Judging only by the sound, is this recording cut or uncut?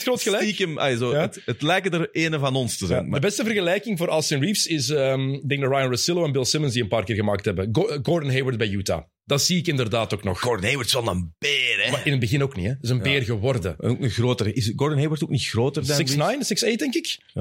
uncut